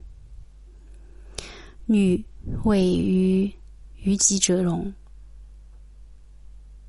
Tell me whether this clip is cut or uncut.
uncut